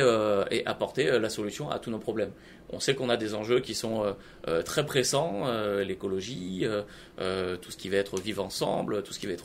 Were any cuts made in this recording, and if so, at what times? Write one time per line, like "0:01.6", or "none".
0:02.7